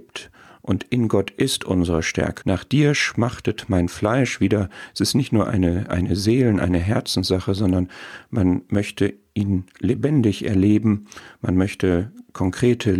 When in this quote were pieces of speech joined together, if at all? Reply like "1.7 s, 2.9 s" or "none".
2.4 s